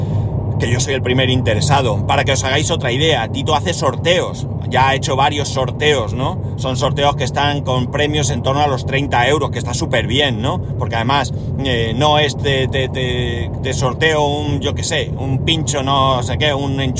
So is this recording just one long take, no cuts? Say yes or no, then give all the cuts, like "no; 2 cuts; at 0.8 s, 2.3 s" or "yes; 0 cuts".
yes; 0 cuts